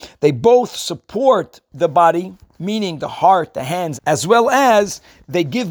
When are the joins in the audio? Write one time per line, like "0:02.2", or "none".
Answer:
0:04.0